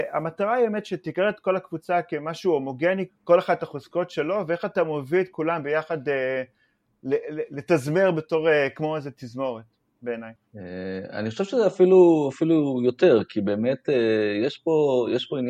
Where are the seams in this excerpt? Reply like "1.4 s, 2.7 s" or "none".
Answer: 3.1 s